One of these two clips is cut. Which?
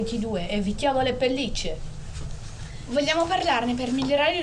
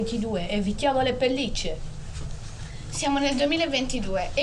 first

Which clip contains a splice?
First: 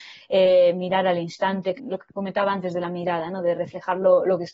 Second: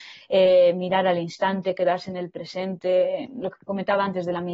first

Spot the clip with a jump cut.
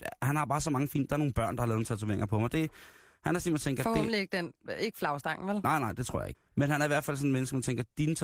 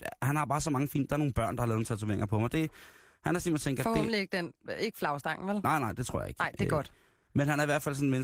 first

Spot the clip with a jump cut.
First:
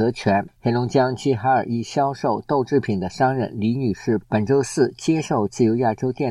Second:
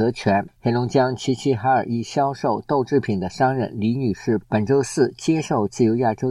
first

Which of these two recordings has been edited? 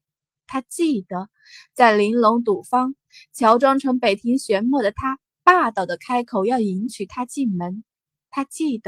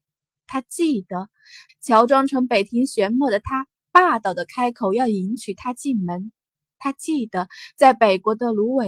second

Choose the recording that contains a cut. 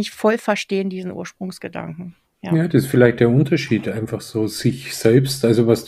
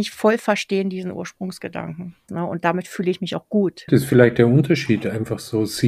second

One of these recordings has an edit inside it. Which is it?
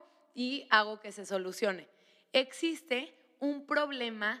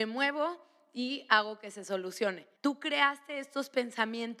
second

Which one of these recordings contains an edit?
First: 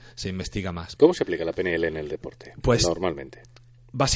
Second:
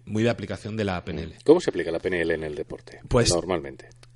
first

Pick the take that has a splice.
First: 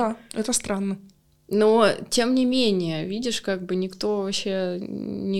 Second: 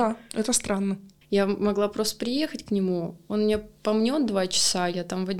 second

